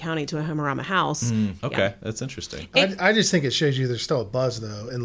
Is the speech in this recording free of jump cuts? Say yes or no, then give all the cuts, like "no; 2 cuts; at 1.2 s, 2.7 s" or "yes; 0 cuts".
no; 1 cut; at 1.6 s